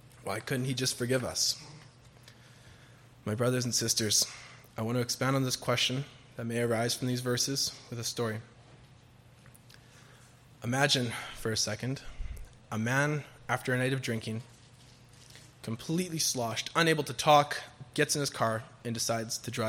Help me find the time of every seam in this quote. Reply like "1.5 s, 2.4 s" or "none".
17.9 s